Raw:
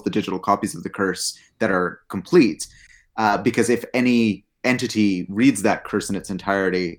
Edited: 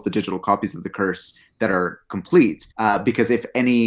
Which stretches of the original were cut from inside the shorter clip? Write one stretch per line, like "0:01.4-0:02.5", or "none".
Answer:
0:02.7-0:03.1